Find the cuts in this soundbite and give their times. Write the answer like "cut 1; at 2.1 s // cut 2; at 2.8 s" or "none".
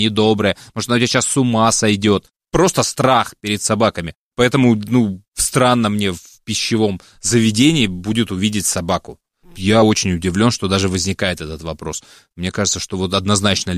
none

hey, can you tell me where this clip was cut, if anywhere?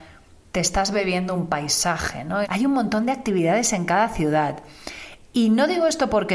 cut 1; at 2.4 s

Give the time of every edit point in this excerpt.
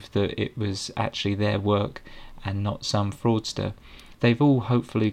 cut 1; at 4.1 s

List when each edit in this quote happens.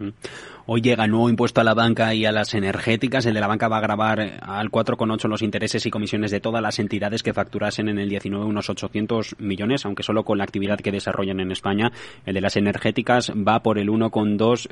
none

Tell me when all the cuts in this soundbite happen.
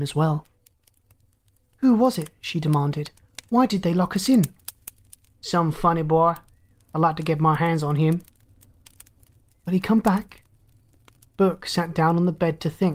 none

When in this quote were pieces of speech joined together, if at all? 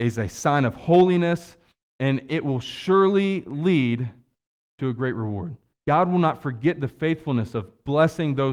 none

